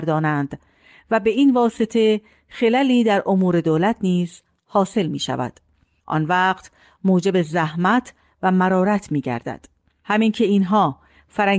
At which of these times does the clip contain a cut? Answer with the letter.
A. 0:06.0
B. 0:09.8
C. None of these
A